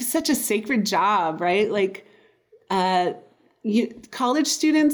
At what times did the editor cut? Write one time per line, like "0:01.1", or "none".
none